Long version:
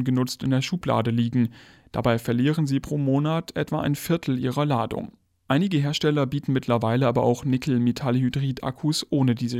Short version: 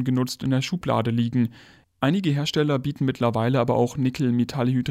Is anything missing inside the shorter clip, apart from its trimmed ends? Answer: yes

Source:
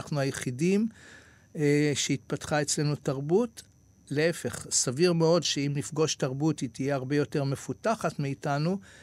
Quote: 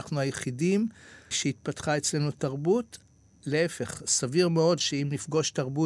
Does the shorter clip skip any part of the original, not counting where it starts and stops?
yes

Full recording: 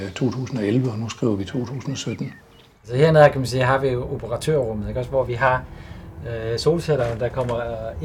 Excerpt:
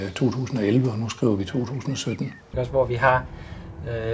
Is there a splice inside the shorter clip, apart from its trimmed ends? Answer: yes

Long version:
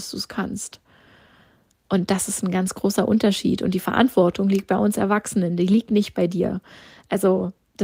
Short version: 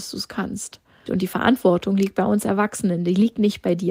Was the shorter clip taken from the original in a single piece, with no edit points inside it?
no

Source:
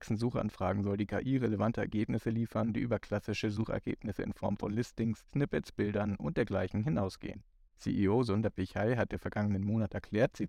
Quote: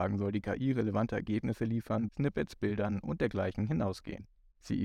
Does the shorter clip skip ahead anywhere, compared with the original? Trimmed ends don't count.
yes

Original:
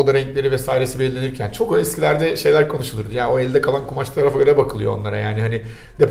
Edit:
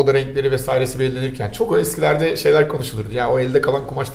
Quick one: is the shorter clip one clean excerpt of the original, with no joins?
yes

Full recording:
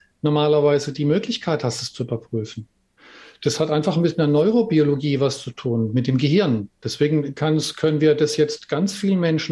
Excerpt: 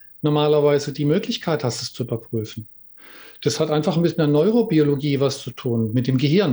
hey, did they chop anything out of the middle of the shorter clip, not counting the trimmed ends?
no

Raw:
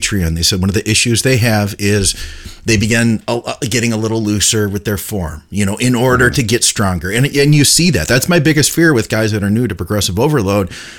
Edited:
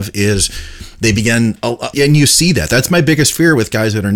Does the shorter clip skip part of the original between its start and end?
yes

